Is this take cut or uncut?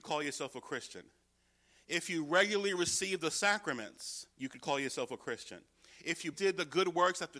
cut